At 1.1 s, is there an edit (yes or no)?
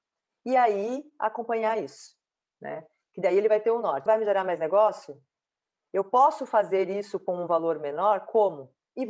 no